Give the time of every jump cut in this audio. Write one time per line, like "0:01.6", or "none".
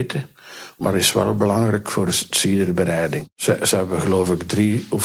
none